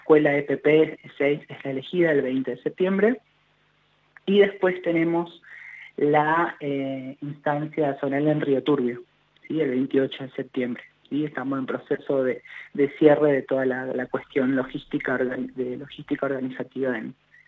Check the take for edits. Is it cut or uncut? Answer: uncut